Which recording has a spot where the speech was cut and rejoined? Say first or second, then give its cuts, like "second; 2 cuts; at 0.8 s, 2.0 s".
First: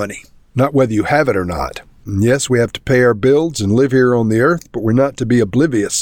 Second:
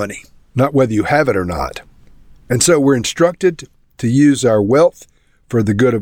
first; 1 cut; at 2.0 s